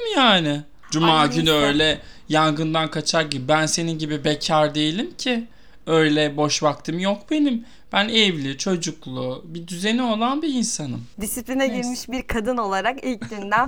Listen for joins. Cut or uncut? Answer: uncut